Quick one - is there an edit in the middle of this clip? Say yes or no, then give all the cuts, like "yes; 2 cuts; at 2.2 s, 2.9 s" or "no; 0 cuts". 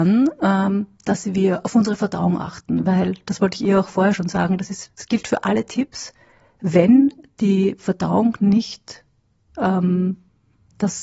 no; 0 cuts